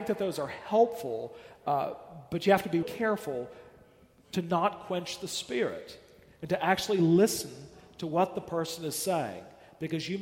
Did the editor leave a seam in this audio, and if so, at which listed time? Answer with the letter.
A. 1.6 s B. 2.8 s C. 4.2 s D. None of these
B